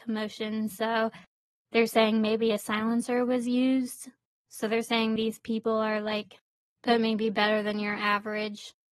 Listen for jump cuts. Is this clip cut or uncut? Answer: cut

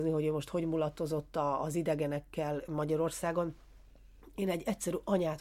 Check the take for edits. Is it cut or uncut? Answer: uncut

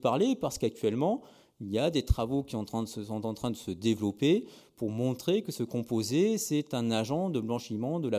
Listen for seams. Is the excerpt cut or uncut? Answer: uncut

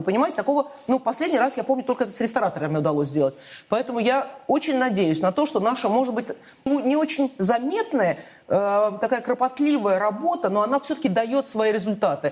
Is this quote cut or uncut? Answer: cut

